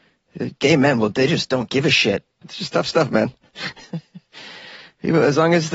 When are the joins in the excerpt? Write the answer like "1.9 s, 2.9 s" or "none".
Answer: 2.4 s